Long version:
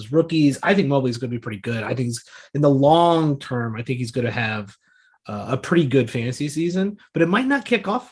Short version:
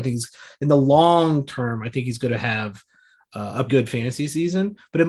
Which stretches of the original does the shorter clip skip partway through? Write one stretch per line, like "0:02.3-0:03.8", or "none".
0:05.6-0:05.9